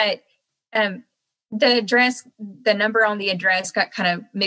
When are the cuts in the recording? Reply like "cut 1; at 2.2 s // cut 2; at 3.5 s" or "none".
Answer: cut 1; at 1.4 s